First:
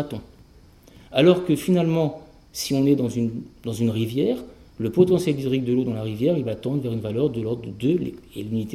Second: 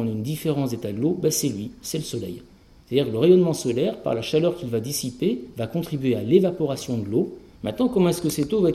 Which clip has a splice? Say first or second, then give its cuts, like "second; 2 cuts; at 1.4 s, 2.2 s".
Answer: second; 1 cut; at 7.5 s